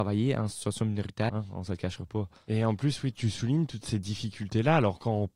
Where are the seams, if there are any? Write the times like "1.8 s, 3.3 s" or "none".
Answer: 1.3 s, 3.1 s